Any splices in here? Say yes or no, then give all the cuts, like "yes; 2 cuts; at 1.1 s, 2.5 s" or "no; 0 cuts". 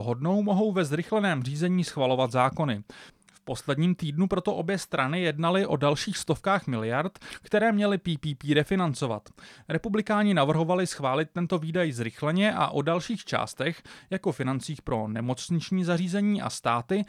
no; 0 cuts